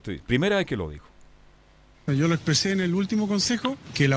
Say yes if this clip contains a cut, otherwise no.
yes